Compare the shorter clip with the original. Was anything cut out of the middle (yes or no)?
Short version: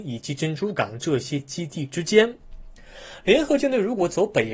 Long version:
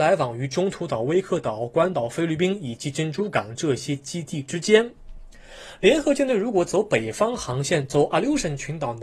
no